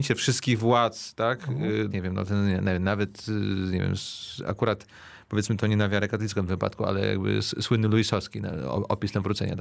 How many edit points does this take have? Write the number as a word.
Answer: one